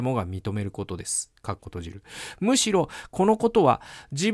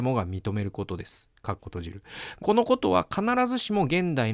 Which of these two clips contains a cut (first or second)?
second